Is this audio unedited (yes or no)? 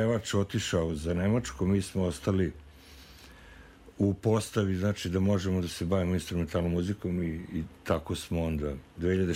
yes